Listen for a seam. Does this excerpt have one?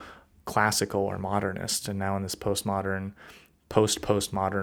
no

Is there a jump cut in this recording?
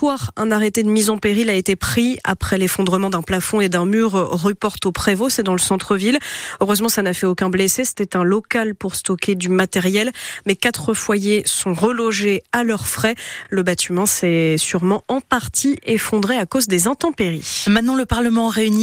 no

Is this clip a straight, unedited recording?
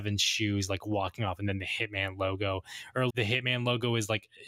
no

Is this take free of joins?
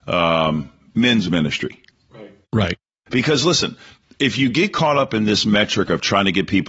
no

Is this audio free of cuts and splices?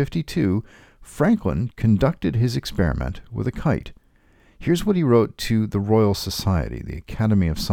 yes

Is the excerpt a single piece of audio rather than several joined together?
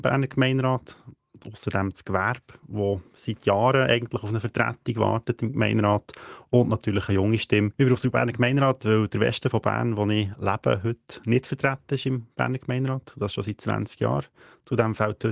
no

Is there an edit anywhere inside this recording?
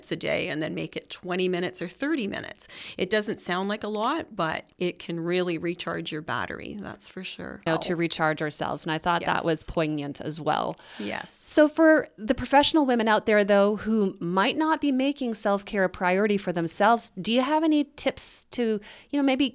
yes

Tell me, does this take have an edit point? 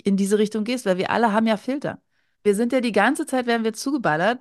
yes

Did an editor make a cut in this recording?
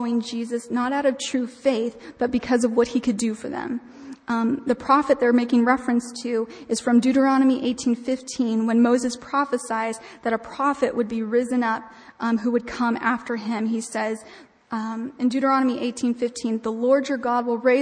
no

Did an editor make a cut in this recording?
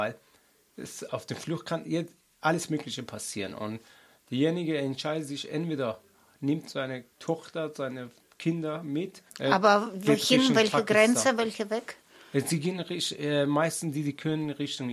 yes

